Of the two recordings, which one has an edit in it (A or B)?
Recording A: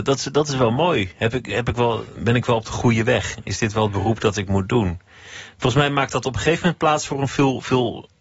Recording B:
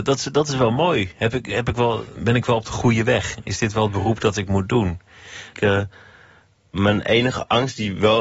B